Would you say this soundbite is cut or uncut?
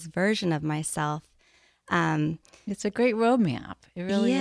uncut